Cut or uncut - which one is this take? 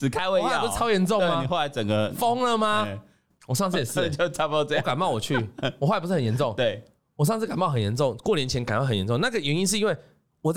cut